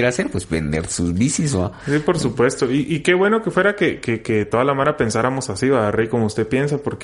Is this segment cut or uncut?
uncut